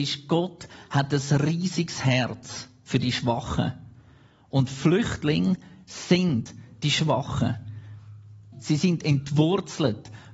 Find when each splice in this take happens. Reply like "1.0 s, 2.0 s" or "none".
8.5 s

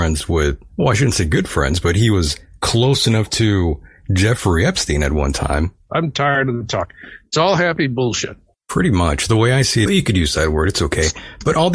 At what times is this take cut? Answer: 5.9 s, 9.9 s

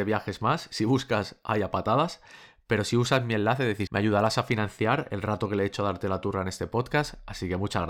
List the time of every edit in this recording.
3.9 s

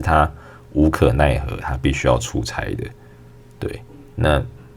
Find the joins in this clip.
none

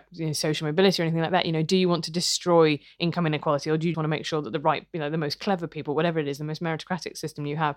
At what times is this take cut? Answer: 3.9 s

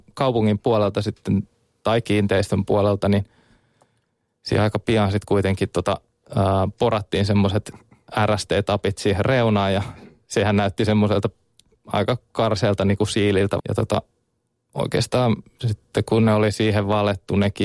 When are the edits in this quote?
13.6 s

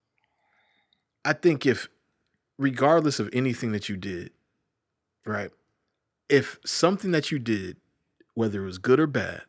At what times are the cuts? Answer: none

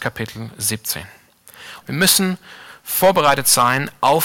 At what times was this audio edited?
1.8 s

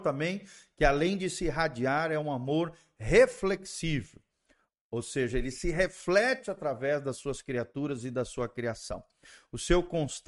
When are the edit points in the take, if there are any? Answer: none

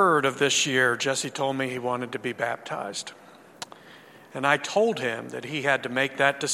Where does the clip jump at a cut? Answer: 4.3 s

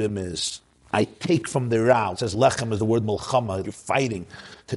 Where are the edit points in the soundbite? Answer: 2.1 s, 3.6 s

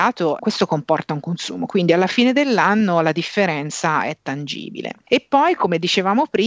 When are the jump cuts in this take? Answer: none

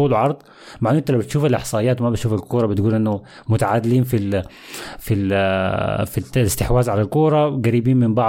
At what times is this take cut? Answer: none

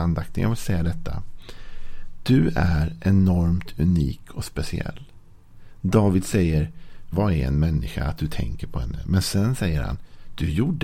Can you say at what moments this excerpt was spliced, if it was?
7.1 s

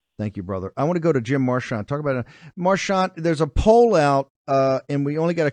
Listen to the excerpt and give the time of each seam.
4.4 s

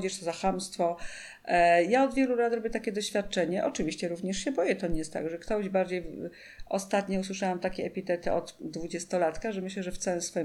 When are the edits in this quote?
none

